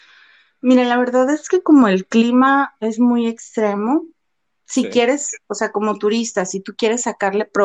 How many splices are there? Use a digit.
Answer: 0